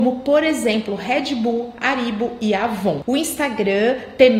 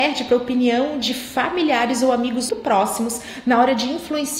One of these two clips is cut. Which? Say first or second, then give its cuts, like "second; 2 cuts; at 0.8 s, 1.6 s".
second; 1 cut; at 2.5 s